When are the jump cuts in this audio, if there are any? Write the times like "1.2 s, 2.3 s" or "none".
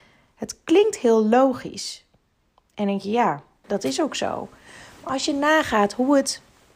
3.6 s